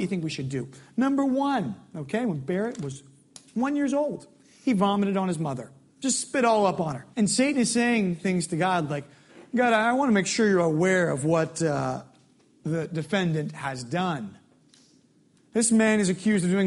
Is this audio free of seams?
no; 1 cut; at 7.1 s

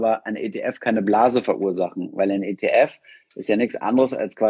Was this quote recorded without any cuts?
yes; 0 cuts

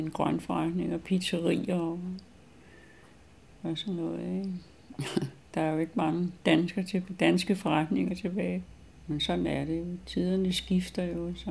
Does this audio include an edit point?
no; 0 cuts

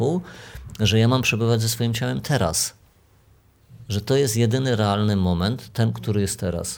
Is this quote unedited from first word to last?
yes; 0 cuts

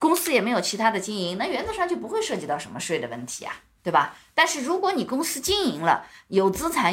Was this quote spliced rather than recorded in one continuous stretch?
no; 0 cuts

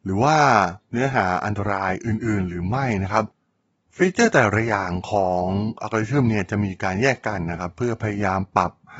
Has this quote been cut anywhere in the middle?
no; 0 cuts

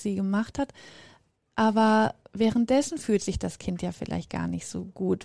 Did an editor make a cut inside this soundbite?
no; 0 cuts

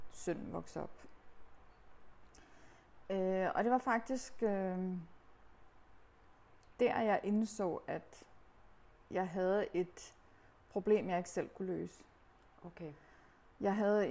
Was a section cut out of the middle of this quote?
no; 0 cuts

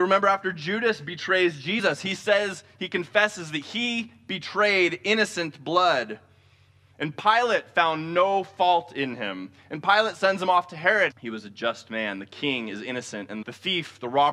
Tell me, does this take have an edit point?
yes; 2 cuts; at 11.1 s, 13.4 s

